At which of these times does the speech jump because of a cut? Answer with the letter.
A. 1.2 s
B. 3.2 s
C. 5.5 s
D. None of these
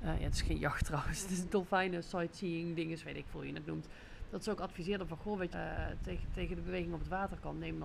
C